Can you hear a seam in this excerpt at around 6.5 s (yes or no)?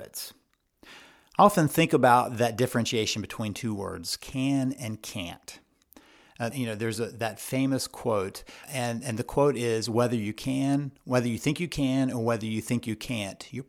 yes